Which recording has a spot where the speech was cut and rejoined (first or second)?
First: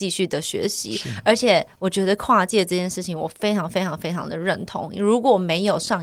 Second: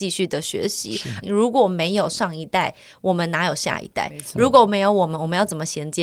second